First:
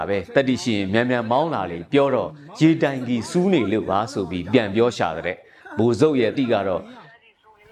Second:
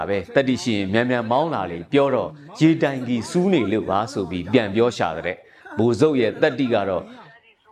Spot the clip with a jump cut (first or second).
first